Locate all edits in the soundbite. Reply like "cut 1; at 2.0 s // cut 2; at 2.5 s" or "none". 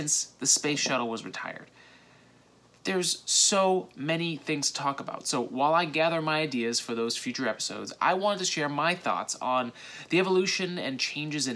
none